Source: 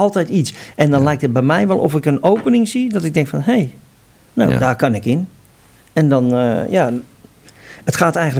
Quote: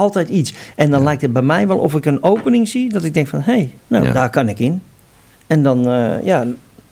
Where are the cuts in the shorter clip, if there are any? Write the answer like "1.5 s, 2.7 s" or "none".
3.8 s